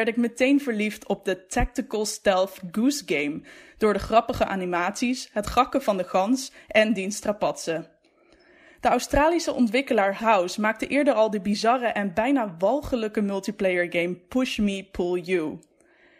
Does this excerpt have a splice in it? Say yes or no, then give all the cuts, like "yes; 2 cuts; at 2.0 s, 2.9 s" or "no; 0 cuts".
yes; 1 cut; at 10.2 s